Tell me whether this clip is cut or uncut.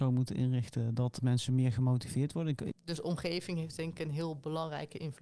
cut